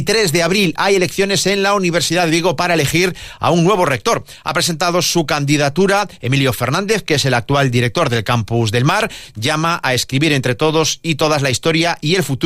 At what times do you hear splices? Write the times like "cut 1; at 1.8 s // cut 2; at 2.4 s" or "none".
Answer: none